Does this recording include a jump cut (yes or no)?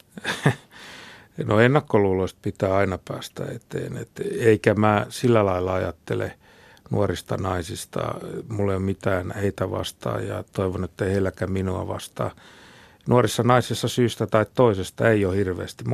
no